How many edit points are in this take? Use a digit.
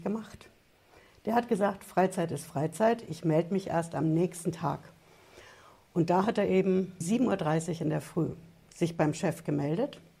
1